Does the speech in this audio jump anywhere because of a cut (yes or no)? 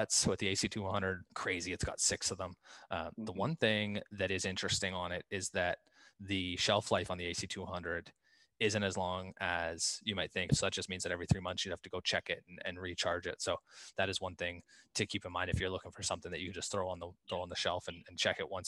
yes